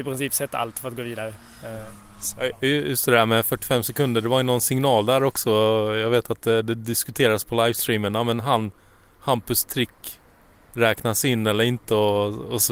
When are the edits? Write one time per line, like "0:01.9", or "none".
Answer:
none